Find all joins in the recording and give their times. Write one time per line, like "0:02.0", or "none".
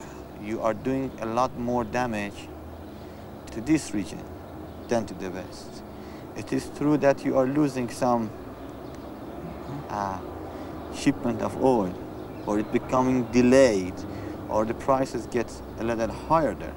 0:03.5